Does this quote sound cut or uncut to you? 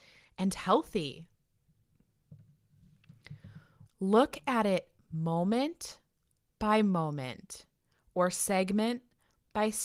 cut